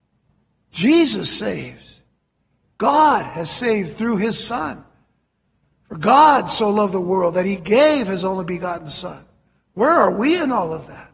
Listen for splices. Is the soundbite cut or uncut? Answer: uncut